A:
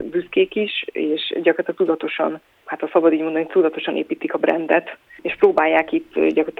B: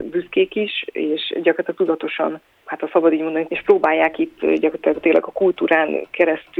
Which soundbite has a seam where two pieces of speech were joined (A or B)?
B